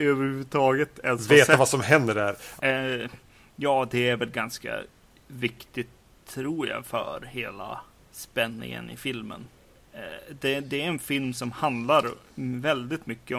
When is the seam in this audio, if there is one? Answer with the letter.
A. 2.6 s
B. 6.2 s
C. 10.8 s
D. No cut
A